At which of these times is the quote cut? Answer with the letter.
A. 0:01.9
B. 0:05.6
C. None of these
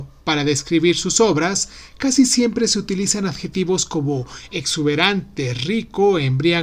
C